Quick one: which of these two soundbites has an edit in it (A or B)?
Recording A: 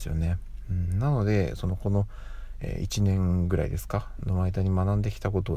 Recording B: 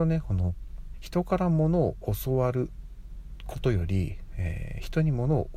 B